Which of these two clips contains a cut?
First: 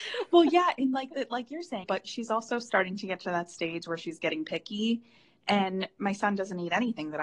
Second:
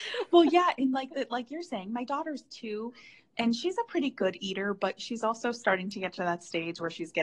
first; 1 cut; at 1.8 s

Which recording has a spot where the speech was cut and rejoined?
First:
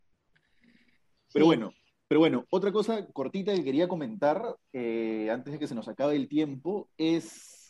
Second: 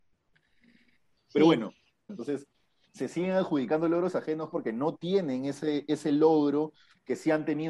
second; 2 cuts; at 2.1 s, 4.5 s

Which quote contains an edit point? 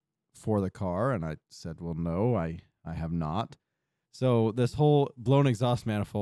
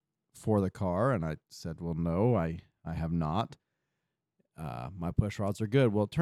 first; 1 cut; at 4.0 s

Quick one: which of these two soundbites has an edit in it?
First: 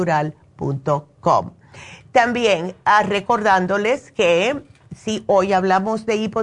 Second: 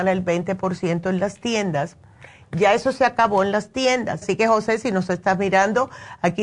second; 1 cut; at 4.2 s

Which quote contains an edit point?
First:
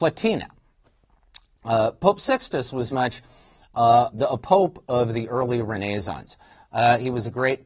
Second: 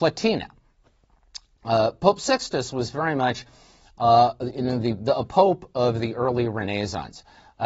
first; 2 cuts; at 2.9 s, 4.1 s

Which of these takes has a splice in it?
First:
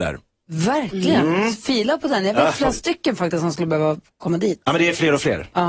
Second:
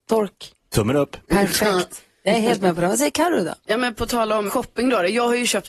second; 1 cut; at 4.5 s

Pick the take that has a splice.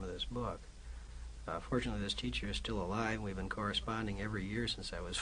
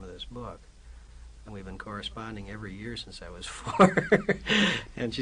second; 1 cut; at 1.5 s

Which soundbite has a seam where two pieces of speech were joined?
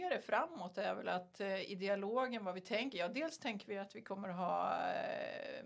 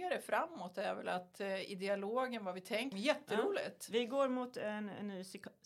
second; 1 cut; at 2.9 s

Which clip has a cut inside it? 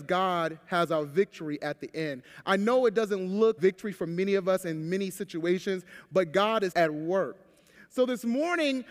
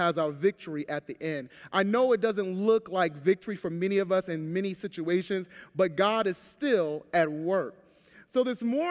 first; 2 cuts; at 3.6 s, 6.7 s

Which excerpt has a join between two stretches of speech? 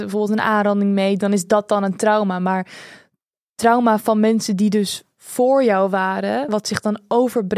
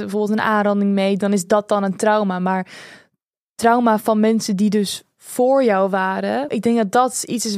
second; 1 cut; at 6.5 s

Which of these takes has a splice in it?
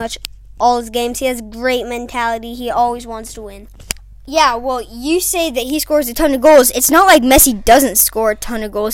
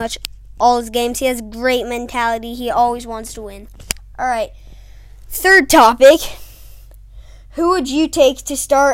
second; 1 cut; at 4.1 s

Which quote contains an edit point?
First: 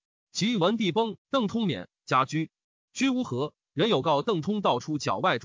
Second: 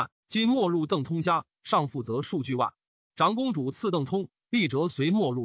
first; 1 cut; at 1.2 s

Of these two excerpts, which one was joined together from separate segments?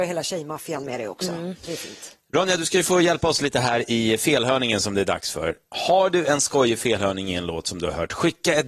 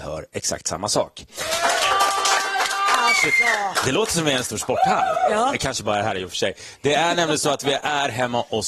second; 1 cut; at 1.3 s

